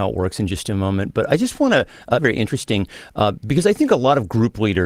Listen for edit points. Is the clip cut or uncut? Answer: cut